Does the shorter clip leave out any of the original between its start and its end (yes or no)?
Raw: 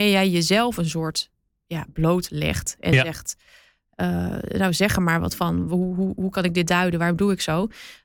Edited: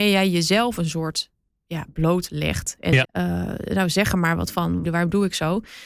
yes